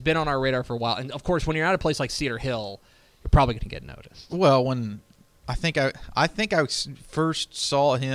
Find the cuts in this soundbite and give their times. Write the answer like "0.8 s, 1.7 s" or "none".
none